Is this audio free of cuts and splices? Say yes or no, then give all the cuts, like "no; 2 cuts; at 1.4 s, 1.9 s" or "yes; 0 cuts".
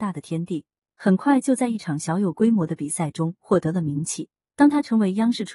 no; 1 cut; at 4.5 s